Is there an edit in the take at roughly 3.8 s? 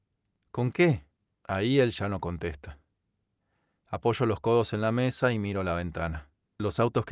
no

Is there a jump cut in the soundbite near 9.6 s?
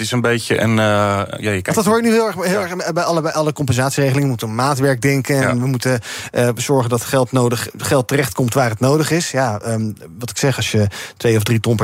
no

